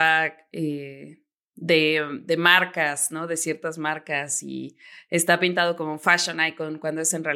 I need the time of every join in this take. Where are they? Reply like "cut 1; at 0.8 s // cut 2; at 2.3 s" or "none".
none